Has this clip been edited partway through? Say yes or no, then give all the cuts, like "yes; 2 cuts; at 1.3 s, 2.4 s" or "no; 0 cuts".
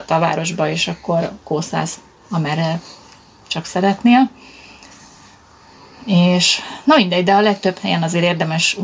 no; 0 cuts